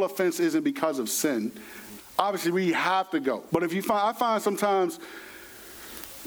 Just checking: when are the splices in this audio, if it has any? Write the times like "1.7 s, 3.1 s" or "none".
2.0 s, 3.5 s